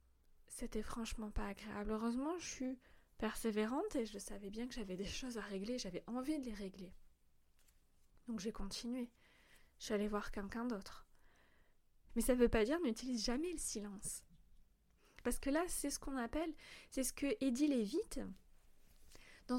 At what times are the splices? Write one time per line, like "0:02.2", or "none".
0:12.1